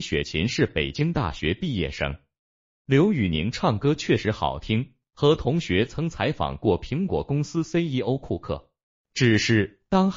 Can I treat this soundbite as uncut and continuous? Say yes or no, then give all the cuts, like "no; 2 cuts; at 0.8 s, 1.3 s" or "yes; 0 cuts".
yes; 0 cuts